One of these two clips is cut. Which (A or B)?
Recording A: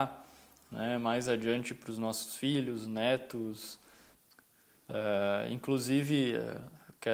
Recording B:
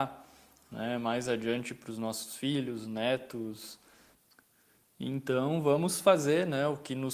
A